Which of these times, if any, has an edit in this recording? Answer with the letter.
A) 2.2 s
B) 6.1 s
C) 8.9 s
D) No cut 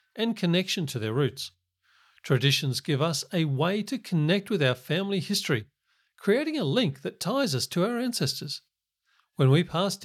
D